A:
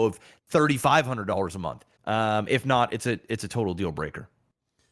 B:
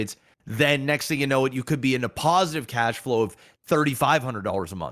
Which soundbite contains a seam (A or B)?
A